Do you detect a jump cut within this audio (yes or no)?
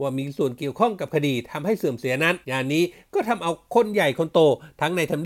yes